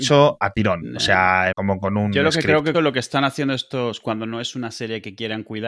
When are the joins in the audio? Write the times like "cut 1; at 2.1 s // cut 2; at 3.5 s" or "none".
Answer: cut 1; at 1.5 s // cut 2; at 2.7 s